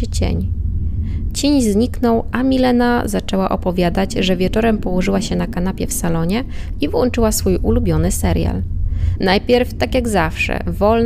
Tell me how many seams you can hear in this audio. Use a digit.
2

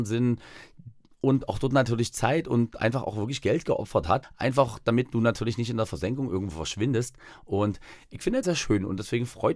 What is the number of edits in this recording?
2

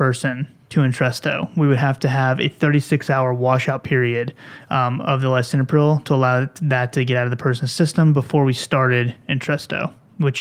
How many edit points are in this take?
0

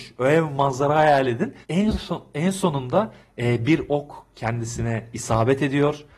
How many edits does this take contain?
1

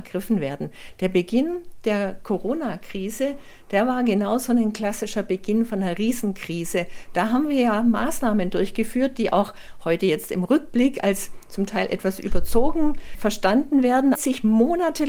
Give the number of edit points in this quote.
2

